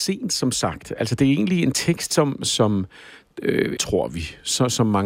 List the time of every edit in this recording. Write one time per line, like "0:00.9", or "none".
0:02.4
0:03.8

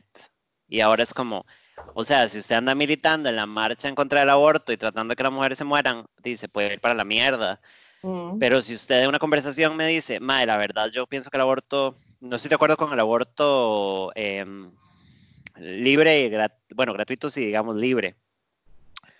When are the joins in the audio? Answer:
none

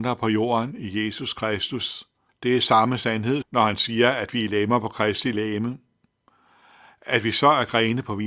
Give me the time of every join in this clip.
0:02.3
0:03.4

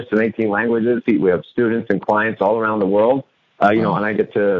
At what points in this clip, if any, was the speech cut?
0:01.0

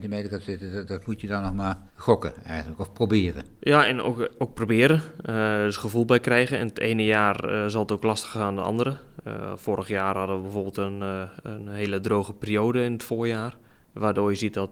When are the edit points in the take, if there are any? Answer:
0:01.9

